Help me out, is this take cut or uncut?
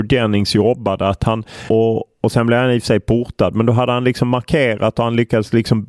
cut